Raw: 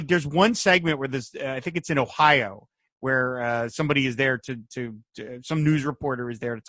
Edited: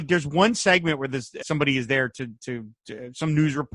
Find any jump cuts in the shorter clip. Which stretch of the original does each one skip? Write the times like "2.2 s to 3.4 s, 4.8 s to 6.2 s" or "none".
1.4 s to 3.7 s